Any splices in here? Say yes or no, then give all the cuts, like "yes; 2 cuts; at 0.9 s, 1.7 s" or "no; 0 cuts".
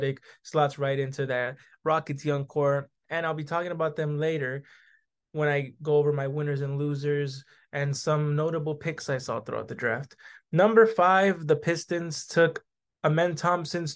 no; 0 cuts